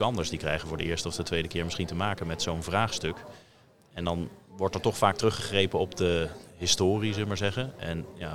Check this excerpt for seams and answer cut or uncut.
uncut